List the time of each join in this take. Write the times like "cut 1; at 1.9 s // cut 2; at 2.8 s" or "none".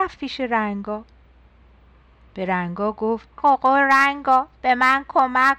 cut 1; at 3.4 s